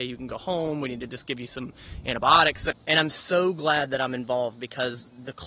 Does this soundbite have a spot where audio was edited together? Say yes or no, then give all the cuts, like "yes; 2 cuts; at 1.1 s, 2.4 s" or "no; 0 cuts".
no; 0 cuts